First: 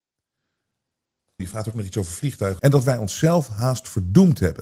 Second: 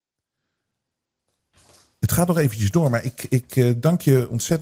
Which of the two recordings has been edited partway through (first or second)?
first